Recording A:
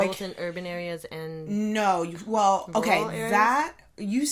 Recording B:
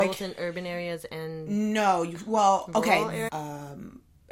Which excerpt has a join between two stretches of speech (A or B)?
B